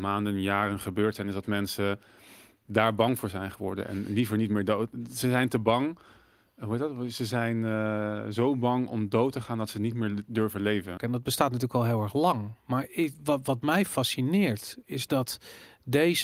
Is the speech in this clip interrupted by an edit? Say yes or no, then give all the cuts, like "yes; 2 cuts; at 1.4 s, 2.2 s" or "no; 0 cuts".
yes; 1 cut; at 11.0 s